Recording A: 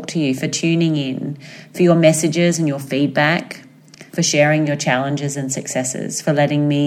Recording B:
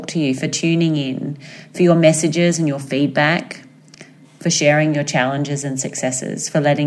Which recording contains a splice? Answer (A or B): A